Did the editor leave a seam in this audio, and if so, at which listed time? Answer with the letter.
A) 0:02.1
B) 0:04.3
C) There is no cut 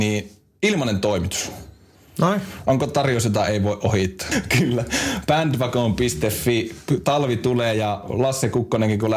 B